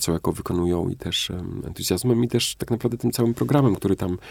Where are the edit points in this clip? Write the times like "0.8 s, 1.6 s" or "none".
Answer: none